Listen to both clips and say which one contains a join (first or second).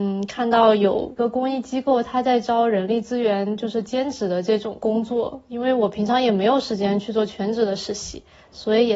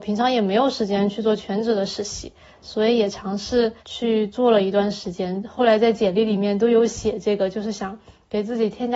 second